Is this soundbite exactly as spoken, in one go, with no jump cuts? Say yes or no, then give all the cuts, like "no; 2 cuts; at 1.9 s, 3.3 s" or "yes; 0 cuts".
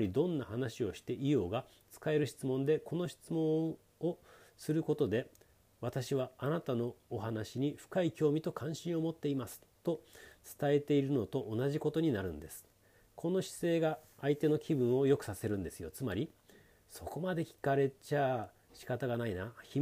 yes; 0 cuts